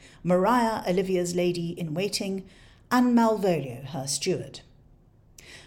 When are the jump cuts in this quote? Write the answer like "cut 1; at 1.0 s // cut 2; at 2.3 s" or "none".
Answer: none